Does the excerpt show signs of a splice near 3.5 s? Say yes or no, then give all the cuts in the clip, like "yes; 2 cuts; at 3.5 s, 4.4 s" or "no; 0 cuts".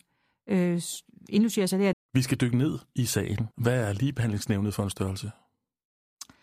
yes; 2 cuts; at 1.9 s, 3.5 s